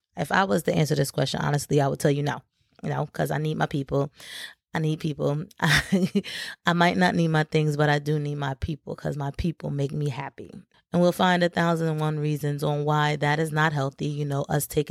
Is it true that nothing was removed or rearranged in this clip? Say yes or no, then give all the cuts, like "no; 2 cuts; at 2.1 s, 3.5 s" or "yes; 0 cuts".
no; 1 cut; at 10.7 s